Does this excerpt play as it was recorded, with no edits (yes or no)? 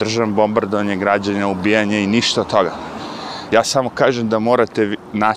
yes